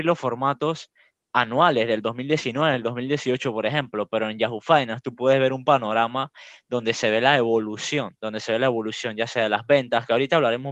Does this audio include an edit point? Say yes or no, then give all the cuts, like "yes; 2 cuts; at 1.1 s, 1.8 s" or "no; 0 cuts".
no; 0 cuts